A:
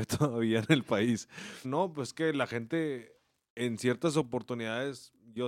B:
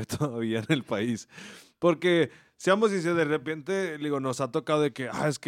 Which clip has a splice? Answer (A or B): A